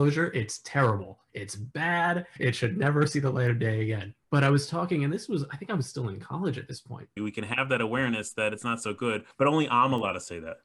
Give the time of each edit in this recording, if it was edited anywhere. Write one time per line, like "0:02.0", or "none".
0:07.2